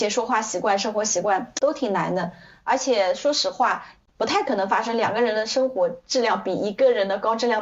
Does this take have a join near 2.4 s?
no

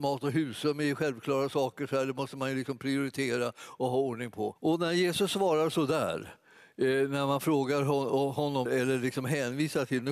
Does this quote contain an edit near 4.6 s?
yes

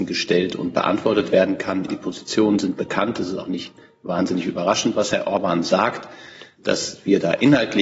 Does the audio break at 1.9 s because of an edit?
yes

